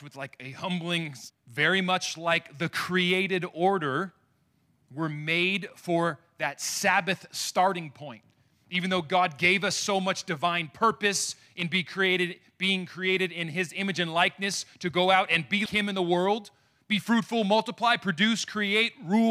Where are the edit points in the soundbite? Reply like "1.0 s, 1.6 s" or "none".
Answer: 1.3 s, 15.7 s